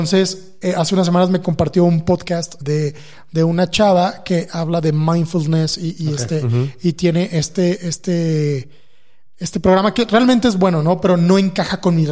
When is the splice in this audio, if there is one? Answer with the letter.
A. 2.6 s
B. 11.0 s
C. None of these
A